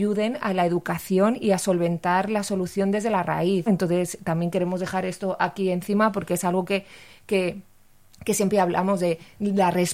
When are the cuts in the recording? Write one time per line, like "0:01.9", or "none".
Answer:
0:03.7